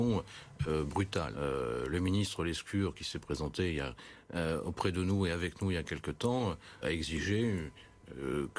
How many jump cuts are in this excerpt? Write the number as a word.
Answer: two